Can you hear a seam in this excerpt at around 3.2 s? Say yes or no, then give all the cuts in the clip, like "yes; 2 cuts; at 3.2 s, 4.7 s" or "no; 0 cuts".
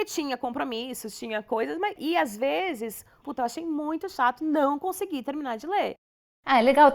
yes; 1 cut; at 3.2 s